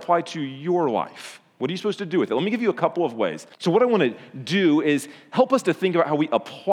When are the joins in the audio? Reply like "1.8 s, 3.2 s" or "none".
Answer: 3.5 s

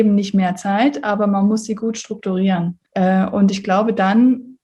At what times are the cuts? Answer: 2.9 s

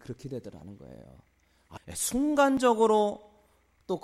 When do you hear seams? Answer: 1.8 s

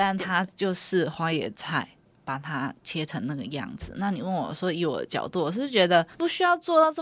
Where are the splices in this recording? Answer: none

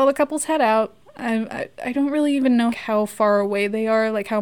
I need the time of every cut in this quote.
1.0 s, 2.7 s

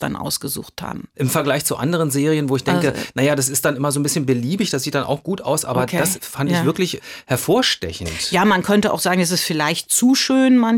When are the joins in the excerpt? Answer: 1.1 s

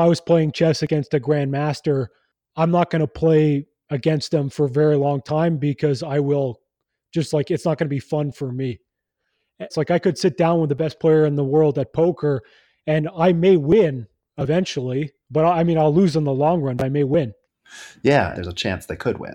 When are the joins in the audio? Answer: 9.7 s, 18.3 s

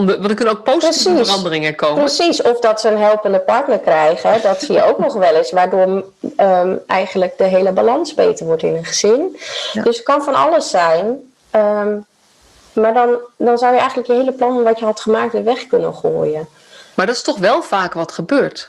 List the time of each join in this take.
none

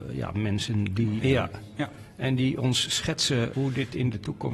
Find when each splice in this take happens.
1.2 s, 3.5 s

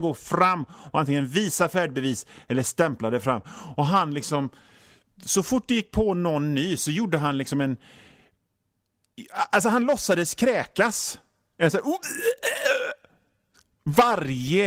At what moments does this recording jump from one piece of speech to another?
none

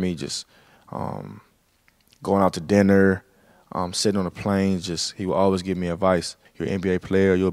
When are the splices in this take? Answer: 6.5 s

